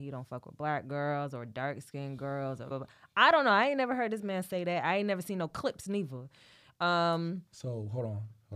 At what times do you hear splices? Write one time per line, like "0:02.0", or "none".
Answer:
0:02.7